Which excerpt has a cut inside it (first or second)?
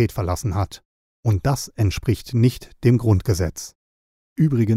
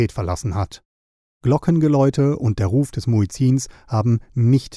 first